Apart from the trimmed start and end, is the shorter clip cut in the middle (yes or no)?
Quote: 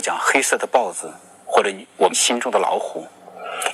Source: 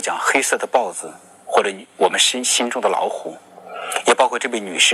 yes